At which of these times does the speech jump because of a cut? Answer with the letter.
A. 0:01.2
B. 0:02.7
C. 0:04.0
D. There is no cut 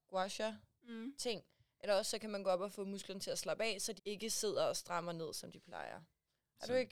C